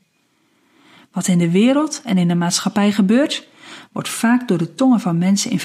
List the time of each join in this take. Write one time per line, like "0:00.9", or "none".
none